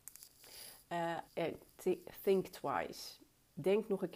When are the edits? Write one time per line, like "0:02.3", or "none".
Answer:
0:01.3